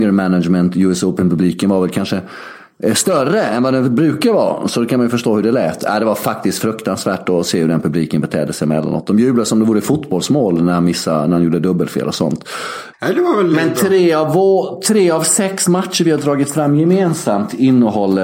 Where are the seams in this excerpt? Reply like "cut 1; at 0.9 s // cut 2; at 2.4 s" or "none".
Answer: cut 1; at 12.9 s